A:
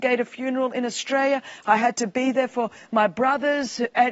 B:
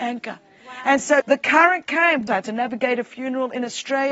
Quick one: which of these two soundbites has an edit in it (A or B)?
B